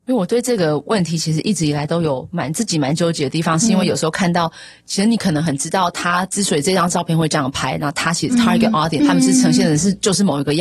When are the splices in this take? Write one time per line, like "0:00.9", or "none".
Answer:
0:09.0